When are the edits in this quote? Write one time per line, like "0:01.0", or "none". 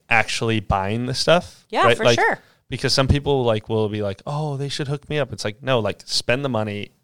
none